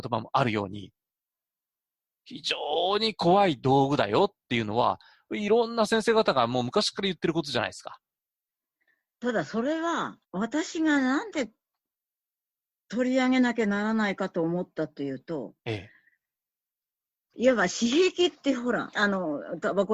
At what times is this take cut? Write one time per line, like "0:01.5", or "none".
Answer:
0:10.2
0:17.3
0:18.9